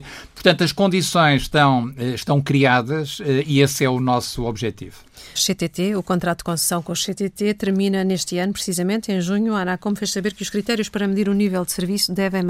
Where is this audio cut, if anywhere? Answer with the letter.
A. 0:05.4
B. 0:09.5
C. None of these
A